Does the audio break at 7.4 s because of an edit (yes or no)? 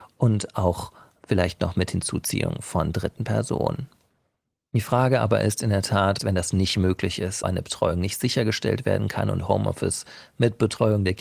yes